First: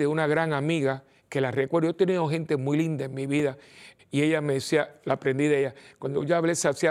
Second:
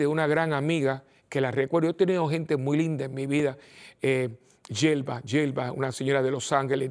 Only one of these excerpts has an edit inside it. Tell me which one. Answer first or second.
first